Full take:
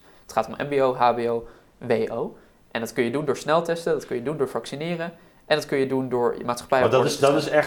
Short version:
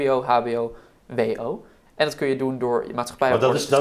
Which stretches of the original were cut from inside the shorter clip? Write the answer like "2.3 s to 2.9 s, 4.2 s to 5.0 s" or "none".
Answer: 2.6 s to 5.4 s